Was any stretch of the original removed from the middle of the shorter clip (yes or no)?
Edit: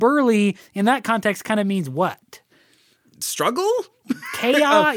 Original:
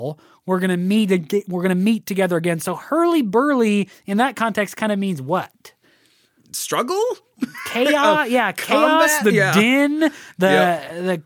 no